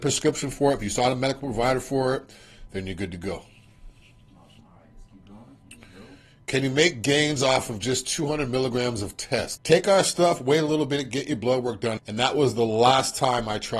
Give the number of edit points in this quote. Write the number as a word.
two